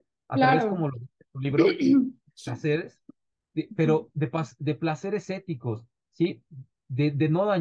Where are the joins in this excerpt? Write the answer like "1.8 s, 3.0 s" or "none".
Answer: none